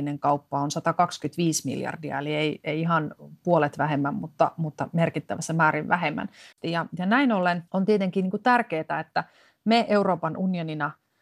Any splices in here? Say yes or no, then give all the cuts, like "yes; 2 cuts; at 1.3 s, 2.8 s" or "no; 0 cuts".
yes; 2 cuts; at 6.5 s, 7.7 s